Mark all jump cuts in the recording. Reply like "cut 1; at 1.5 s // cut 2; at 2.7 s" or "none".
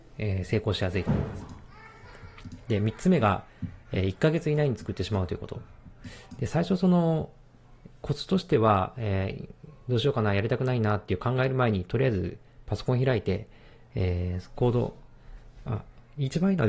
cut 1; at 6.4 s